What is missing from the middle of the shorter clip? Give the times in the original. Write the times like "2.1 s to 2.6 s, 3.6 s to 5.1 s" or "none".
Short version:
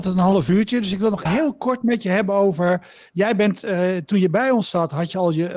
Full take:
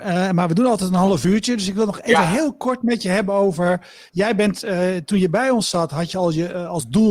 2.0 s to 2.2 s